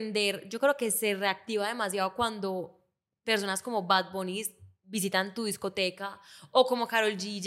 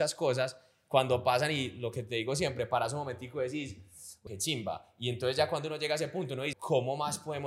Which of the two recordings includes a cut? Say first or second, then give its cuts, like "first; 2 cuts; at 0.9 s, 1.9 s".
second; 2 cuts; at 4.3 s, 6.5 s